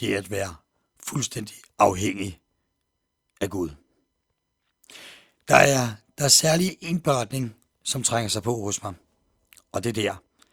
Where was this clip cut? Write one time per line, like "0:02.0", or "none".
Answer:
none

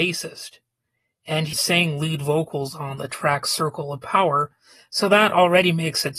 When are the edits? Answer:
0:01.5

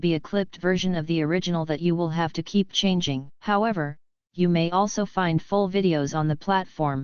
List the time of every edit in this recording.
0:03.3

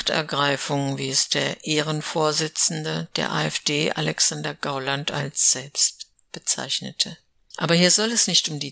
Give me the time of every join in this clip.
0:07.5

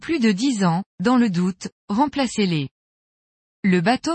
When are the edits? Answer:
none

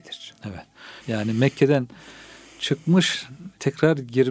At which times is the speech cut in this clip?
0:01.0

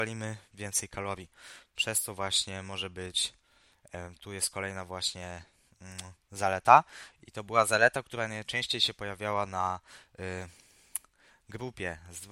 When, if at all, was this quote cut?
none

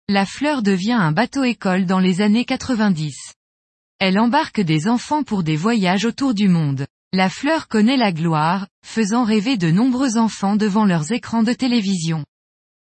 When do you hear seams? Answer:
0:06.9

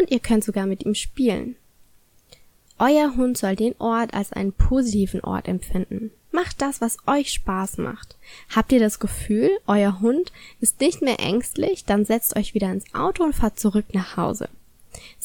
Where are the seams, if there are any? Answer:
0:06.3

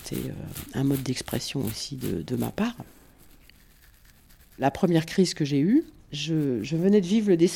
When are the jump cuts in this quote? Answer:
none

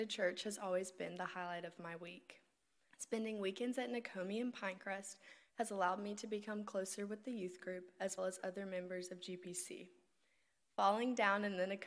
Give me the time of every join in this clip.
0:02.9
0:08.2

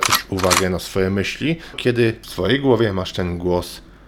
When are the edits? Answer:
0:01.7

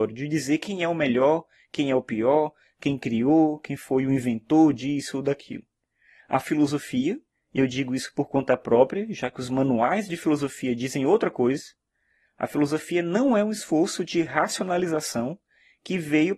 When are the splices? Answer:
none

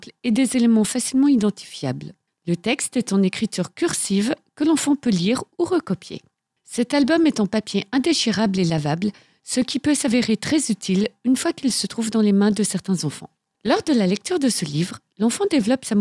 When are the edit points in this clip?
none

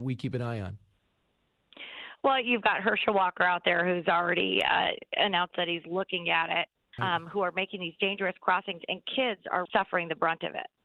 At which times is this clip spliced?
0:07.0
0:09.7

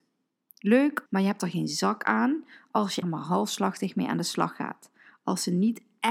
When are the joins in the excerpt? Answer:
0:01.1
0:03.0

